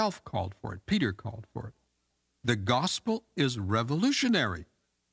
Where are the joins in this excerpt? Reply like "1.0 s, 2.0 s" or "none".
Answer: none